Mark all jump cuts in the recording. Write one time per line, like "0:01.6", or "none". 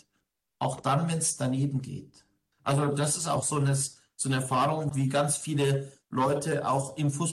0:02.5
0:04.9

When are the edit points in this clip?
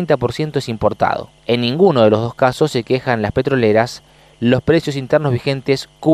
0:01.4

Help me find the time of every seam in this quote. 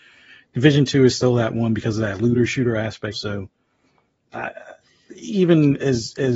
0:03.1

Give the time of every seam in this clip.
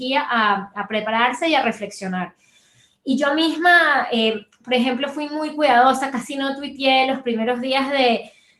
none

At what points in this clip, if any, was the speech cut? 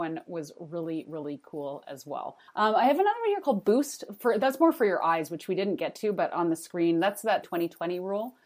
0:02.5
0:07.4

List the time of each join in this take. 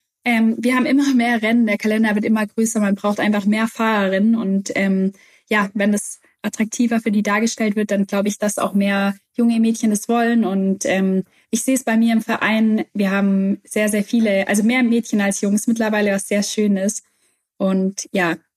none

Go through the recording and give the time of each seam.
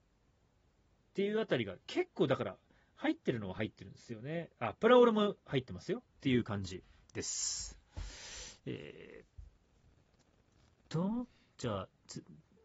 0:06.2

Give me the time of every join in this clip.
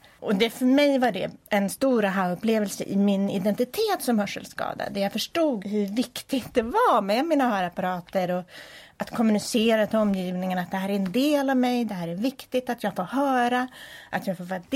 0:05.6

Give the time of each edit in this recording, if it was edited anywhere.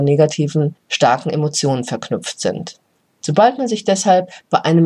0:03.1

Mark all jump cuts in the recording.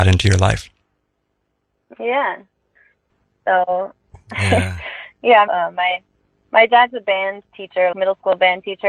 0:03.1
0:05.5
0:07.9

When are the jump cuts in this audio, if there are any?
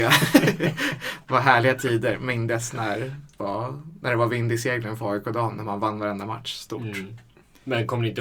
0:03.4

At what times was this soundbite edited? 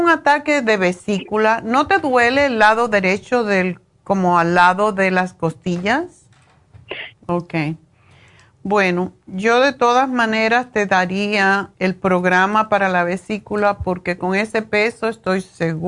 0:07.1
0:11.7

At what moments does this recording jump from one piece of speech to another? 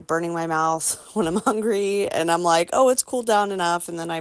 none

